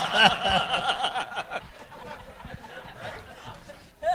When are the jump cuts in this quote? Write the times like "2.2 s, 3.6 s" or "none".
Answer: none